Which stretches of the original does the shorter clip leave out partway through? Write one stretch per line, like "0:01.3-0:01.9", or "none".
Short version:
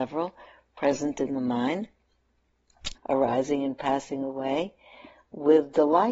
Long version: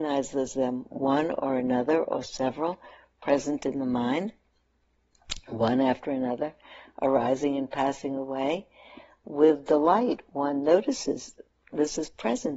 0:05.4-0:06.9